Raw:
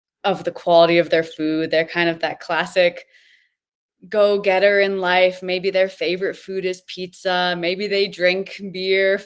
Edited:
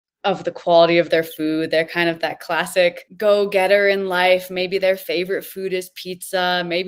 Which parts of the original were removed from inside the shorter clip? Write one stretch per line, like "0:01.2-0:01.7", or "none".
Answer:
0:03.1-0:04.0